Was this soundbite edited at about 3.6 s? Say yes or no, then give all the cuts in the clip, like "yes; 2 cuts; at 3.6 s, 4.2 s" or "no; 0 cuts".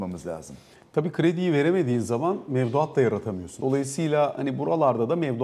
yes; 1 cut; at 3.6 s